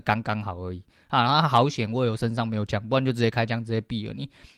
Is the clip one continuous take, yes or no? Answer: yes